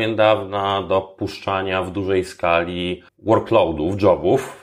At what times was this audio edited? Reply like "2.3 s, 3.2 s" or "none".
3.1 s